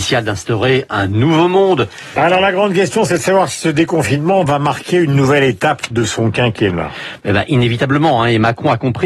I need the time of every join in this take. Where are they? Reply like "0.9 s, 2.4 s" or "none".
2.2 s